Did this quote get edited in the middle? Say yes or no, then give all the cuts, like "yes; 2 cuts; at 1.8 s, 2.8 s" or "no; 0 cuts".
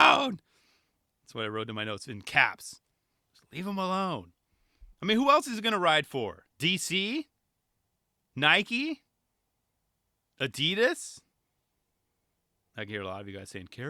yes; 2 cuts; at 4.9 s, 6.5 s